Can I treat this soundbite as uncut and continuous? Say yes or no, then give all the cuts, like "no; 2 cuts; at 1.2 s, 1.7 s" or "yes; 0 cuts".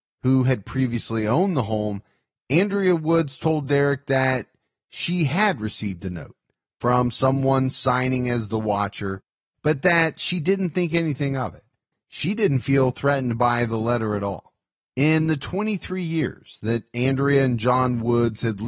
no; 1 cut; at 11.9 s